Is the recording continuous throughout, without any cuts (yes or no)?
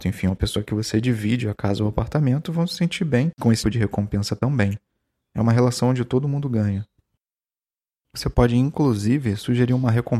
no